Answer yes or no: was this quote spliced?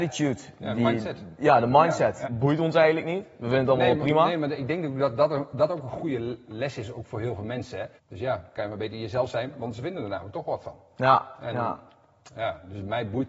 yes